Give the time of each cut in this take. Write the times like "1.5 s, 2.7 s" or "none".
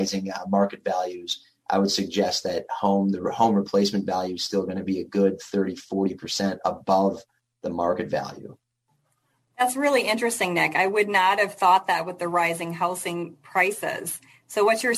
none